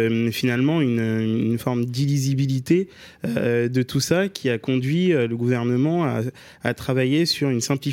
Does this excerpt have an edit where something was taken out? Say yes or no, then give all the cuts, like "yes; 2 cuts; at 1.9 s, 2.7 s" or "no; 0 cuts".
no; 0 cuts